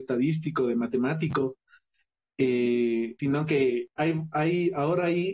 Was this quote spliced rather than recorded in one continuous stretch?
yes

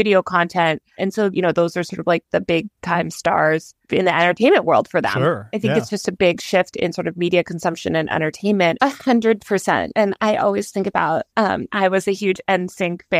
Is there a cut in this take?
yes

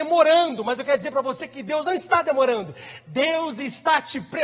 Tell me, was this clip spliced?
no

